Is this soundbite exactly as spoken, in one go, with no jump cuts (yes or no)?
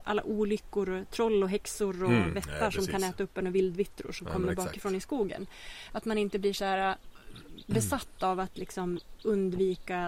yes